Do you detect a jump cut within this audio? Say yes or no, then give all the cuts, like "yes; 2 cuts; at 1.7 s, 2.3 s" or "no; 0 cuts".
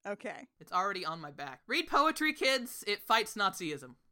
yes; 1 cut; at 1.6 s